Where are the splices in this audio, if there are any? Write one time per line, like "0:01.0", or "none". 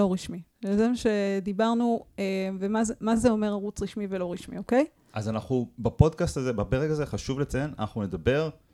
none